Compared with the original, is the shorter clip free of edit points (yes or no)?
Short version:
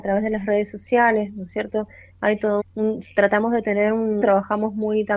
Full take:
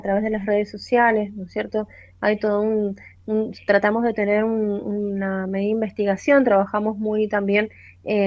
no